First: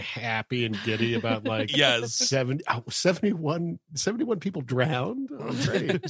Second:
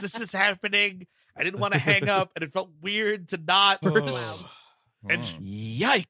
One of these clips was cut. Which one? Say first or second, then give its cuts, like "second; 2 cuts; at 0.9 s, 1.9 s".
second; 1 cut; at 3.8 s